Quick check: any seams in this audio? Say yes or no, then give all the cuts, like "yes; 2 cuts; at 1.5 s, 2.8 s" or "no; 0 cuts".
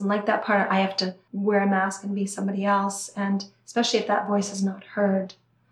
no; 0 cuts